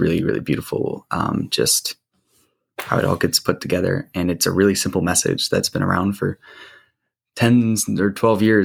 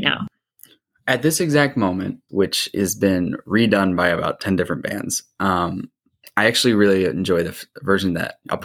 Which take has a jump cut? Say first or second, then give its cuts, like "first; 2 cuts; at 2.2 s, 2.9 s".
second; 1 cut; at 2.3 s